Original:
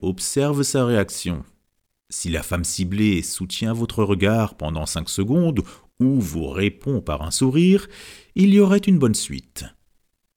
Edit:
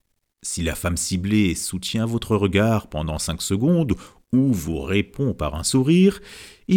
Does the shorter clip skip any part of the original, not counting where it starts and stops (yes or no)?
no